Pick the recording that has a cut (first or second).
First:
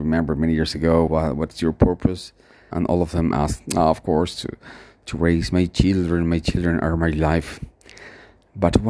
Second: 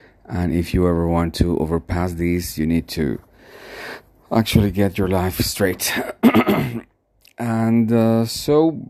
first